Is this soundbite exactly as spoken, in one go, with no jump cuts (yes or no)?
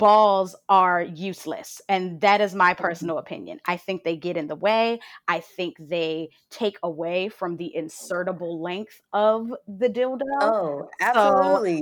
yes